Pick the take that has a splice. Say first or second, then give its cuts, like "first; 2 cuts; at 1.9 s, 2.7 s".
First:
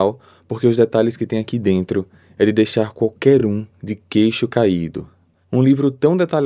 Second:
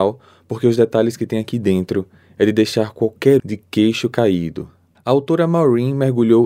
second; 2 cuts; at 3.4 s, 4.9 s